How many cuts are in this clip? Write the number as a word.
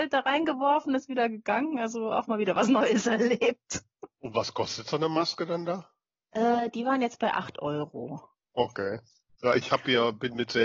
zero